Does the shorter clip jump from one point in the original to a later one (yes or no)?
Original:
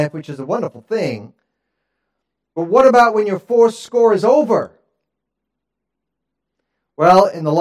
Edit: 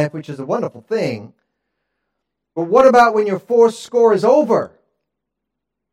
no